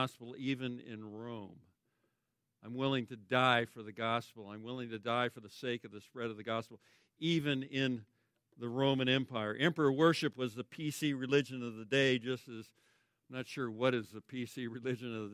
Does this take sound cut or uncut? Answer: uncut